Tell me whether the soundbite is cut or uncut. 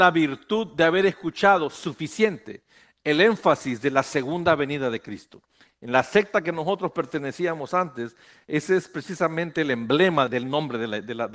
cut